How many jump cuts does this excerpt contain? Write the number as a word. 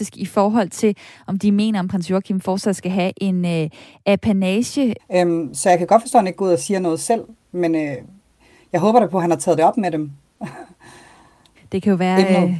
one